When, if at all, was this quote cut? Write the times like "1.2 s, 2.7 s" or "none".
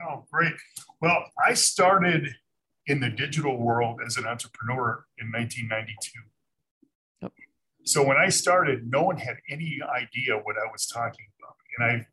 none